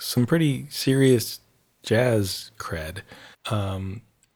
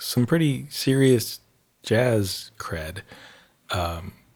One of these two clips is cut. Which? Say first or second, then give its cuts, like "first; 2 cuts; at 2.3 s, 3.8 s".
first; 1 cut; at 3.3 s